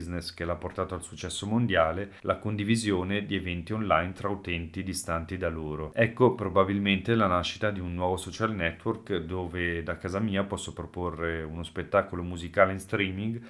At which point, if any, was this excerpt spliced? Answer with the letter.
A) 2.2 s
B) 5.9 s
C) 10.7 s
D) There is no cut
A